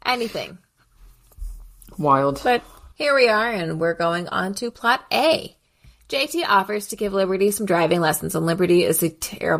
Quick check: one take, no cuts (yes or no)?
no